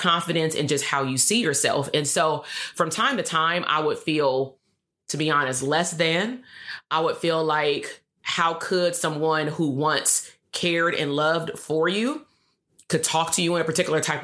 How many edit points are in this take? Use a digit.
0